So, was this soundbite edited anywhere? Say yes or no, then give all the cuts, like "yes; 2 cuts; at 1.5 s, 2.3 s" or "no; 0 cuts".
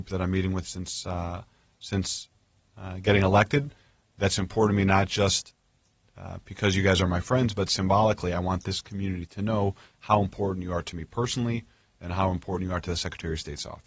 no; 0 cuts